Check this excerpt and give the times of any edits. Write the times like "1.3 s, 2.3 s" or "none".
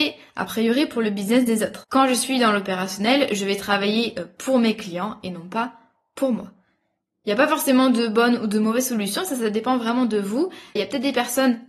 1.8 s, 10.8 s